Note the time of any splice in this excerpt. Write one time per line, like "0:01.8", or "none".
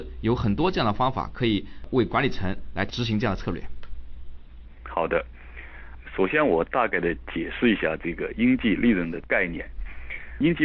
none